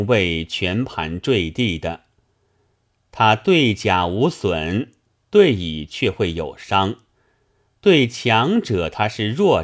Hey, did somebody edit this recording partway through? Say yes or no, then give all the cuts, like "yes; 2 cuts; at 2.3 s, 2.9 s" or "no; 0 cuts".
no; 0 cuts